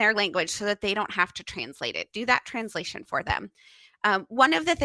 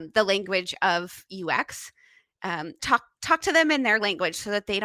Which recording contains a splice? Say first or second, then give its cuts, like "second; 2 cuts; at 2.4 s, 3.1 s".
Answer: second; 1 cut; at 2.8 s